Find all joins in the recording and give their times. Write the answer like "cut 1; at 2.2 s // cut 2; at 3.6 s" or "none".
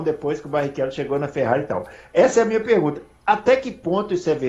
none